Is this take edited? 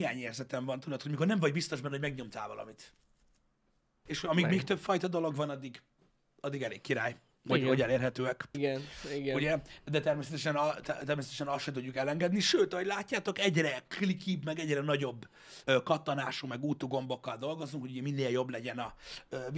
yes; 3 cuts; at 4.1 s, 8.5 s, 15.6 s

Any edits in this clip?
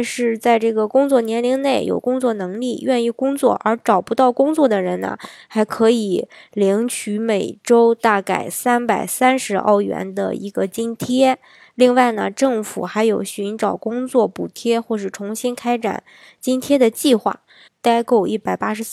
yes; 1 cut; at 17.7 s

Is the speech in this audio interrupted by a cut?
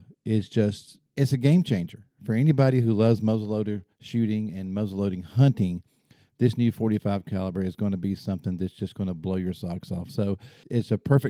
yes; 2 cuts; at 3.9 s, 10.1 s

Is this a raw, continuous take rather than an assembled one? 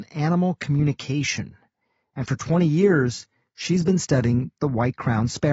yes; 0 cuts

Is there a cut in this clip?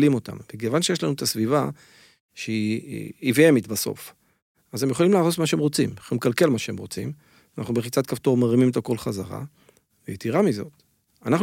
no; 0 cuts

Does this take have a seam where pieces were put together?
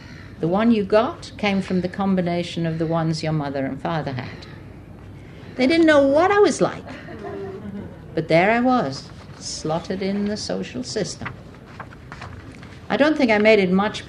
yes; 1 cut; at 5.6 s

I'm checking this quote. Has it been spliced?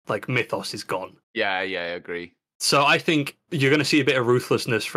yes; 1 cut; at 1.2 s

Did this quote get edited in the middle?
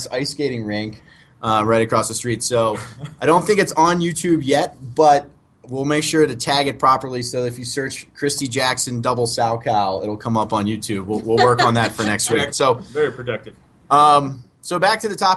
yes; 1 cut; at 12.5 s

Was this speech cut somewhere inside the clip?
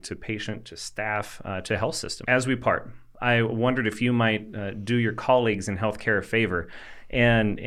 yes; 1 cut; at 2.2 s

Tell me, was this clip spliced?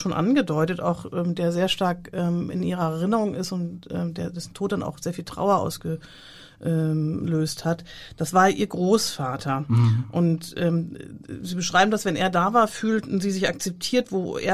no; 0 cuts

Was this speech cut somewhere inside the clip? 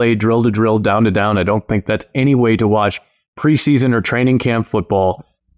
no; 0 cuts

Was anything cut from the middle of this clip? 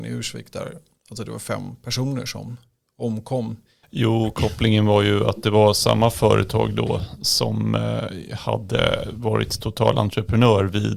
yes; 1 cut; at 3.8 s

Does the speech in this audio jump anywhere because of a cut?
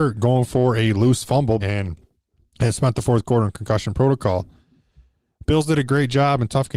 yes; 1 cut; at 1.6 s

